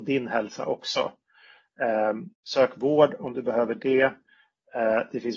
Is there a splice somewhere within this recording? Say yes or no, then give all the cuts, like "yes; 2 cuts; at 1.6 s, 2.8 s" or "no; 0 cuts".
yes; 1 cut; at 2.3 s